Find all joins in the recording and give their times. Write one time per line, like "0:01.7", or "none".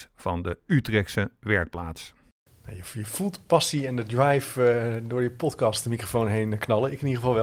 none